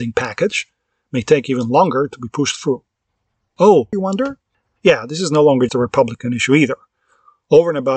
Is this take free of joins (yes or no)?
no